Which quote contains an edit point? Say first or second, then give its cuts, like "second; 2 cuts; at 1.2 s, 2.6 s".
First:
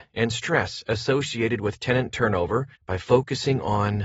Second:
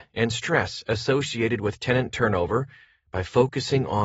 first; 1 cut; at 2.7 s